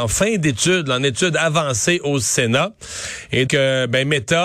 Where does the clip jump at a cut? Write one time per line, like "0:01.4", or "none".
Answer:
0:03.5

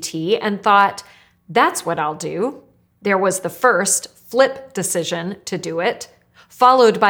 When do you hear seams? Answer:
0:02.9

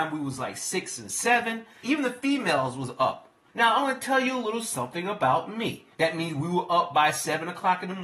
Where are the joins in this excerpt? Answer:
0:01.8
0:03.5
0:05.9

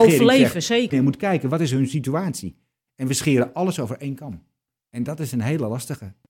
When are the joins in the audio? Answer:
0:00.9

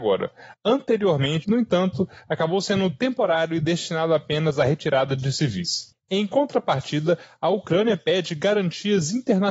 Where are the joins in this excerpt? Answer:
0:01.4
0:05.9

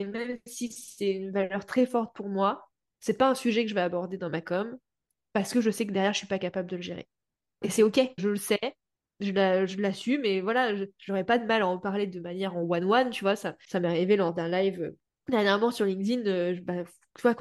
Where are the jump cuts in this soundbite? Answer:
0:08.2

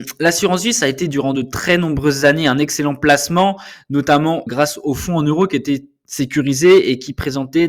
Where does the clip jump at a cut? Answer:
0:04.5

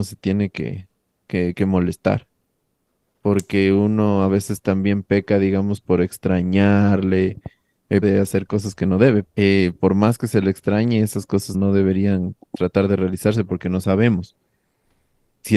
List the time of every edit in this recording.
0:08.0
0:09.2
0:11.5

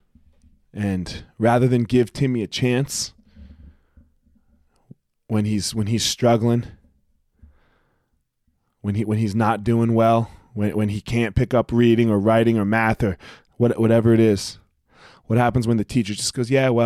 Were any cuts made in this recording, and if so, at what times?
none

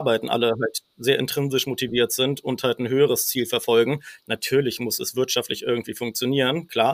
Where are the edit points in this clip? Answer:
none

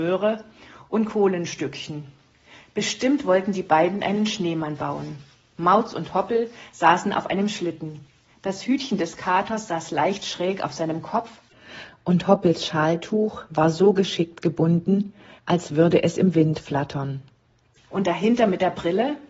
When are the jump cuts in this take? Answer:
0:15.4
0:17.9

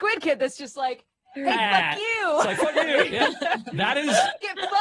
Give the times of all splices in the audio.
none

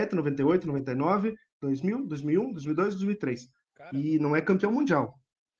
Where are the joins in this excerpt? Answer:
0:03.6

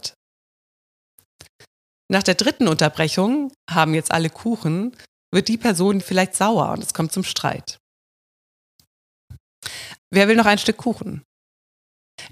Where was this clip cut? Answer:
0:06.0
0:10.0

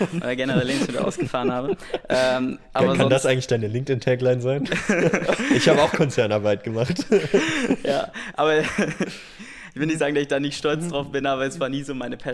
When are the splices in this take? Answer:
none

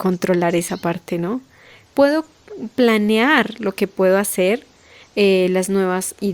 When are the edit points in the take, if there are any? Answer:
0:01.9
0:05.0

